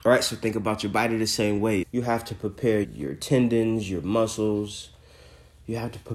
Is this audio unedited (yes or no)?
no